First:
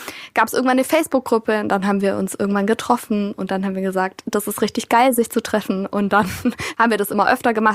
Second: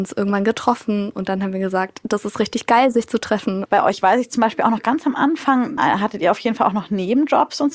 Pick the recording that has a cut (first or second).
second